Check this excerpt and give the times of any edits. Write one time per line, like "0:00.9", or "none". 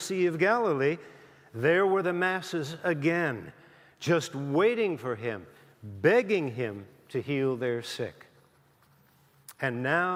none